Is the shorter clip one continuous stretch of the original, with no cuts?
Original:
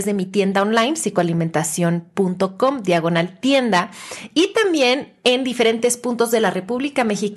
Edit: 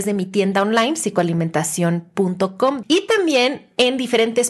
no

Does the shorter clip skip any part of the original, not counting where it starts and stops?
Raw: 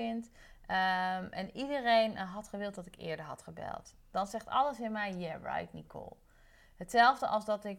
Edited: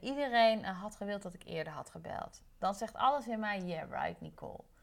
no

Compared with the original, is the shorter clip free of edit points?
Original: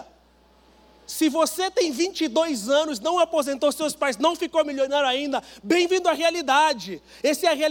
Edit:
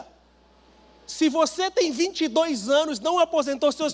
yes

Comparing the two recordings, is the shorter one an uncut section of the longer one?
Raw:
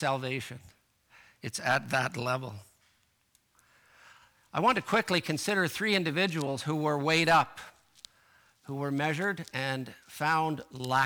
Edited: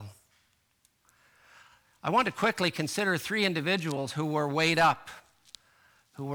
yes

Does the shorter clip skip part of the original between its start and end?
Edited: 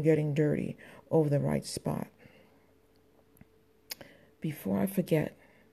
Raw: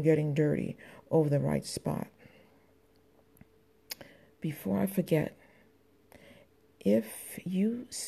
no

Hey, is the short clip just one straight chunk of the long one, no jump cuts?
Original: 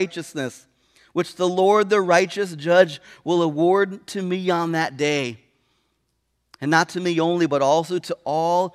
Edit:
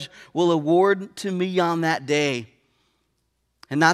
yes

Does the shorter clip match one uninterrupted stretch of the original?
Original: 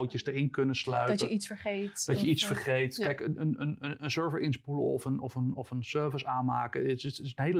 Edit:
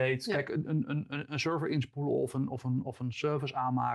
yes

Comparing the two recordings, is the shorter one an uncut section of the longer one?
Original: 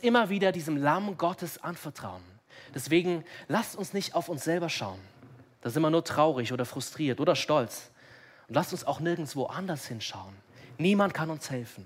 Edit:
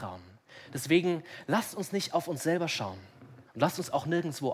no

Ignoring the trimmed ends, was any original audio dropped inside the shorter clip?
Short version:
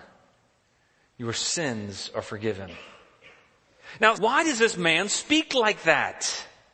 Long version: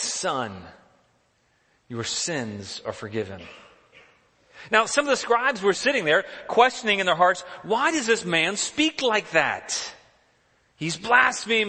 yes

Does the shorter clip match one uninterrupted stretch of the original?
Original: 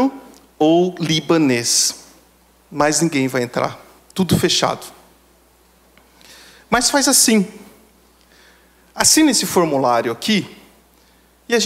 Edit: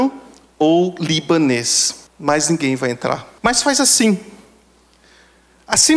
no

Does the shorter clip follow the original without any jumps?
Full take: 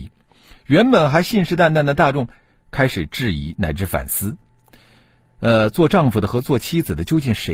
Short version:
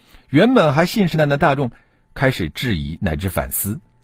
no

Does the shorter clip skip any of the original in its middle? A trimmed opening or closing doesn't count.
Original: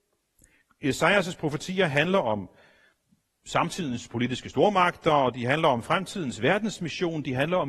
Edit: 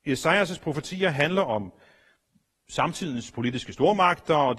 no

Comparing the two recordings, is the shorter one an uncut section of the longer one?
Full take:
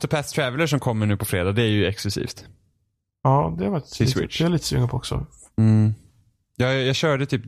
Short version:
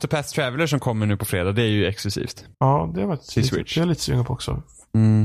no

